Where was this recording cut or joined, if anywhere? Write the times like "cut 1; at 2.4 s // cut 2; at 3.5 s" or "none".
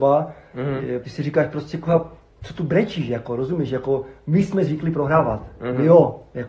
cut 1; at 1.0 s

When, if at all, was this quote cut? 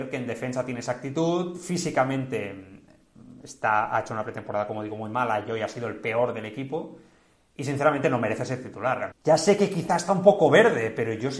cut 1; at 9.1 s

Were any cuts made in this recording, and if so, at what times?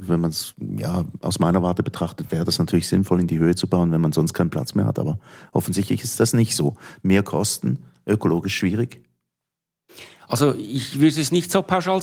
none

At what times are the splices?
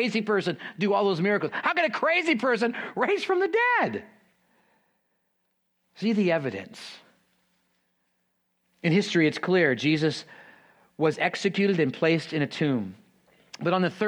none

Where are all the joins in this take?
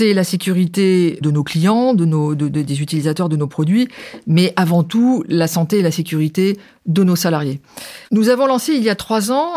cut 1; at 1.2 s // cut 2; at 8.0 s

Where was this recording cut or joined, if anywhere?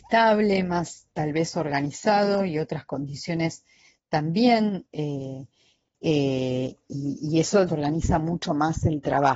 cut 1; at 5.9 s // cut 2; at 7.7 s

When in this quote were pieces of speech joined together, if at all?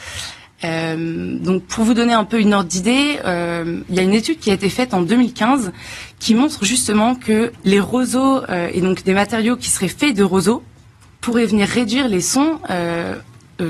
cut 1; at 7.5 s

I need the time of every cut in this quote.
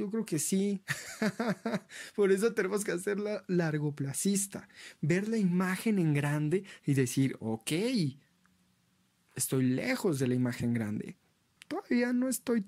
cut 1; at 11.6 s

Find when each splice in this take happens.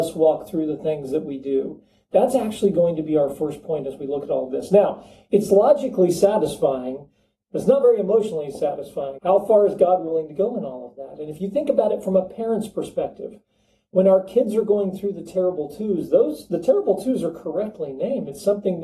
cut 1; at 9.2 s

